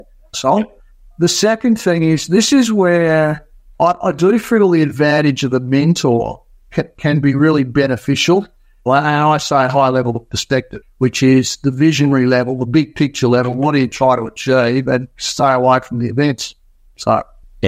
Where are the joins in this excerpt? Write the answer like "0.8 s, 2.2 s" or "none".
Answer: 8.9 s